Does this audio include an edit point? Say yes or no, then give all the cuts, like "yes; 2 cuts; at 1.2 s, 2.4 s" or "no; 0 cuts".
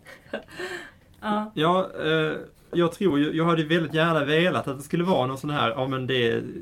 yes; 1 cut; at 2.7 s